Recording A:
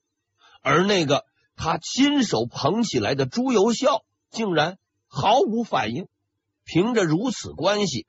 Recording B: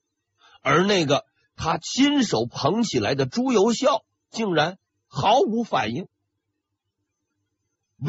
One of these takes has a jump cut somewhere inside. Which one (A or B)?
A